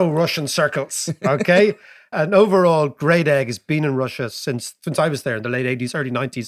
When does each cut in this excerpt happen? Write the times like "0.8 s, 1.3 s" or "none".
2.1 s